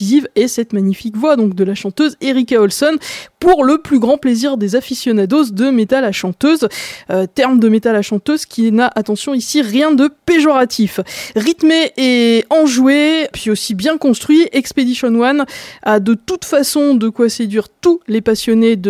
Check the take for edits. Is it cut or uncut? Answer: cut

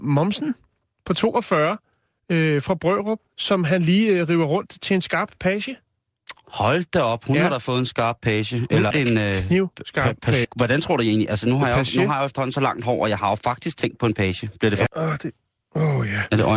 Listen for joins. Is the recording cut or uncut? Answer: cut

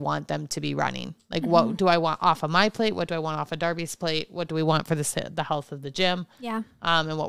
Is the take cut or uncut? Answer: uncut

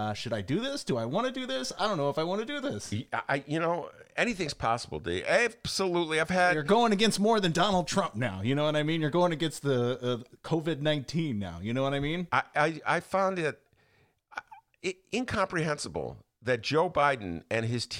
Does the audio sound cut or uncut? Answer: uncut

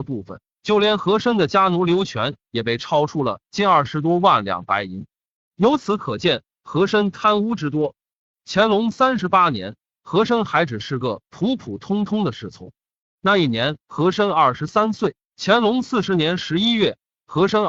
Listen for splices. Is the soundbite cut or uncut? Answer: uncut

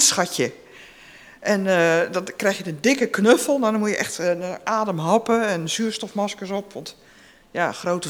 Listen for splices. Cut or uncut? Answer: uncut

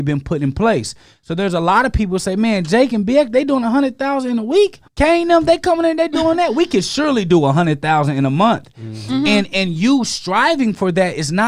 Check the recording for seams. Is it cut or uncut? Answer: cut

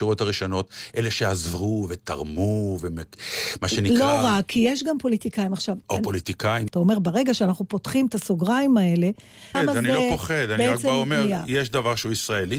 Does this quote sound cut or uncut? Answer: cut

